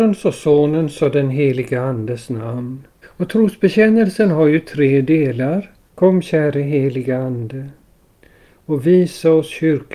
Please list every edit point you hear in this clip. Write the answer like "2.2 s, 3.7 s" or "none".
3.0 s, 5.9 s